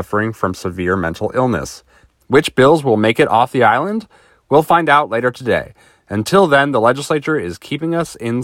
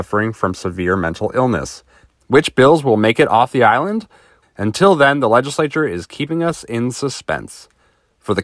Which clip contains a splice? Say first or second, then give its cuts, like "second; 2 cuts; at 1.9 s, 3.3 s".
second; 1 cut; at 4.4 s